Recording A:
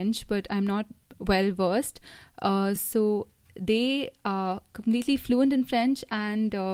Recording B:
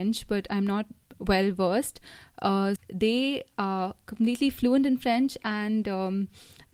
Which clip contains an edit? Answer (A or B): B